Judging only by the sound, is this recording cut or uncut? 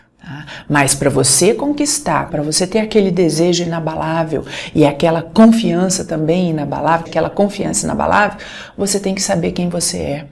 cut